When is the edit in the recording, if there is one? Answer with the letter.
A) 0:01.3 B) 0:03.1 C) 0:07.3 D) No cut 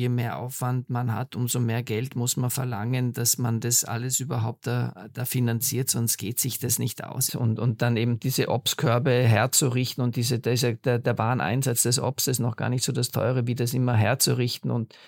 C